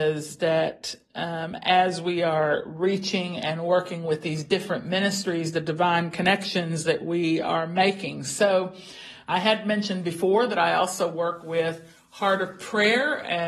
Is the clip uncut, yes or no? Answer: yes